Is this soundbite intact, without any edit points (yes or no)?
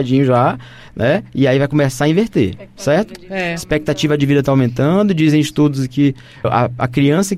no